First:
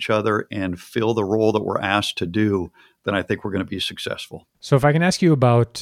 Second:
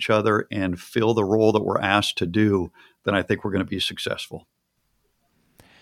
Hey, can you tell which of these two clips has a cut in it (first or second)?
first